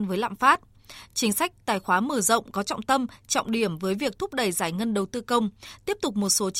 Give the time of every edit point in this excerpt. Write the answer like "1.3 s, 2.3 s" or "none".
none

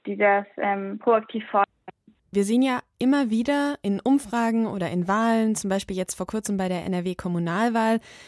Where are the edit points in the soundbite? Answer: 2.3 s

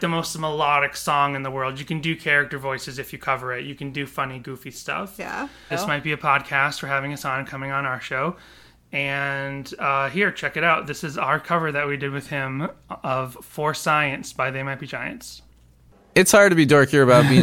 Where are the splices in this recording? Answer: 5.7 s

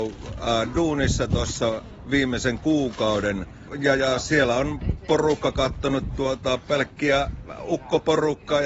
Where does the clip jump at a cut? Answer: none

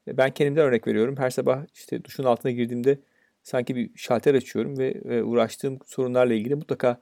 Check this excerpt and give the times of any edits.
none

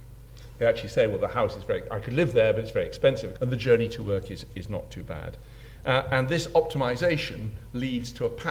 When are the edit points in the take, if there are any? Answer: 3.4 s

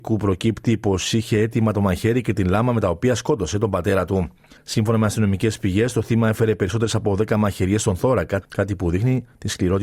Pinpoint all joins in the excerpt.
4.6 s, 8.4 s

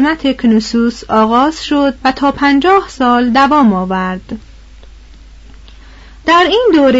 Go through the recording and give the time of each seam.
2.0 s

